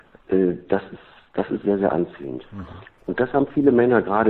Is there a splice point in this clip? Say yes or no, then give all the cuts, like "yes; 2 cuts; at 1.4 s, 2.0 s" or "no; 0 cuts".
no; 0 cuts